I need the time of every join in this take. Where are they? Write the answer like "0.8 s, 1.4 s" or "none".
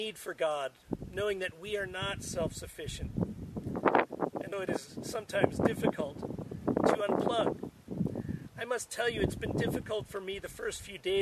4.5 s